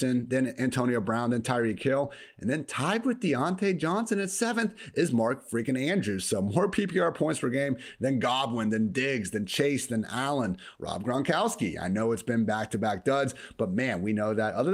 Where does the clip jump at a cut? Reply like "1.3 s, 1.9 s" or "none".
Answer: 10.7 s